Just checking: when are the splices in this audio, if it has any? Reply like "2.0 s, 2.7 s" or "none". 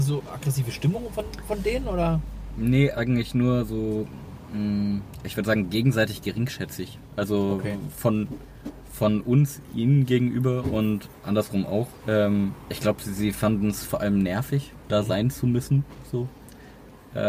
2.9 s, 12.0 s